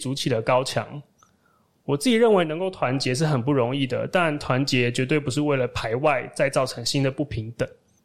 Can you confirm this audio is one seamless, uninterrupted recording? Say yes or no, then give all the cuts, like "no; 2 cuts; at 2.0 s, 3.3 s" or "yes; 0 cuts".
yes; 0 cuts